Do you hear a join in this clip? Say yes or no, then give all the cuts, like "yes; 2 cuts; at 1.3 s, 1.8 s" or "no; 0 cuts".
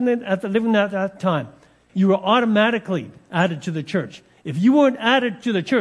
yes; 1 cut; at 1.9 s